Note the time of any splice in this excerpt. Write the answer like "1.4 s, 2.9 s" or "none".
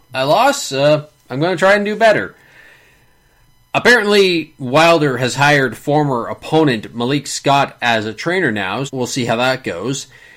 8.9 s